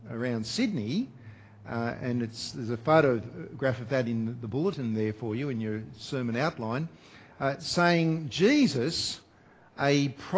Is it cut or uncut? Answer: uncut